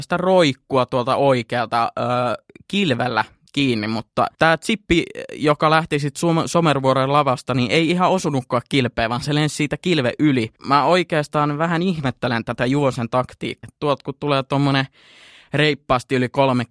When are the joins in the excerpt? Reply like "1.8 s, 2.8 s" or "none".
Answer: 10.6 s, 13.6 s